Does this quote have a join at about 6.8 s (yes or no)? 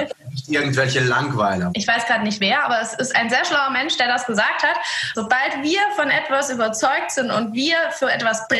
no